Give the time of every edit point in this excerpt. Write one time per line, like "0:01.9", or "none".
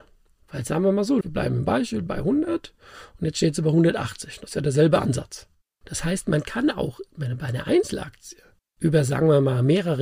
0:01.2
0:05.8

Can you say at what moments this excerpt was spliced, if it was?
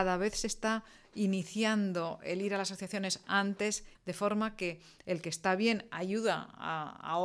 0:03.9

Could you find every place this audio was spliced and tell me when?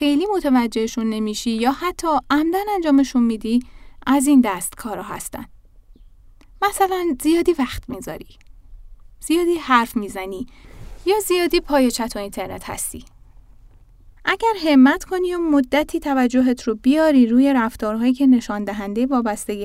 0:14.2

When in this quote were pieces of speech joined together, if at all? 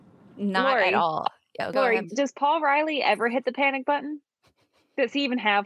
0:02.1

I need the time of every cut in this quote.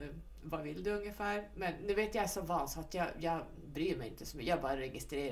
none

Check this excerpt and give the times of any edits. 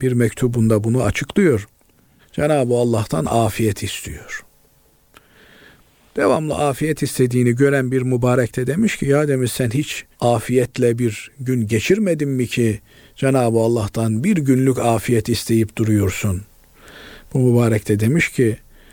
0:02.2
0:10.1

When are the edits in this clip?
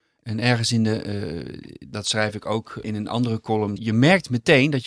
0:03.8

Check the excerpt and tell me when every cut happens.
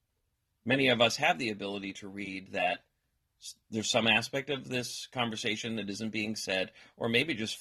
none

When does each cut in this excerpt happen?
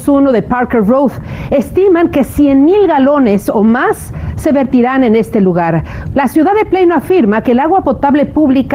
0:06.1

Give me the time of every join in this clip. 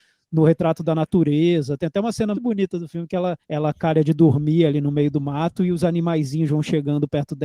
0:02.3
0:03.4

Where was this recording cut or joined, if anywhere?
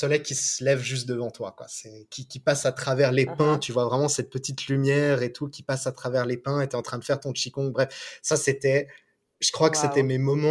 none

